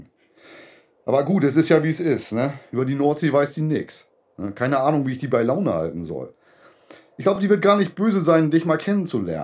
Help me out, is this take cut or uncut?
uncut